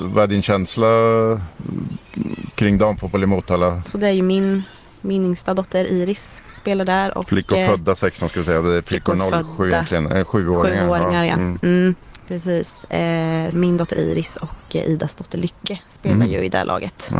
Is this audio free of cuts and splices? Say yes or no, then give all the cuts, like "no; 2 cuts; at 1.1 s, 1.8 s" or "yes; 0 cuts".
no; 2 cuts; at 3.9 s, 13.5 s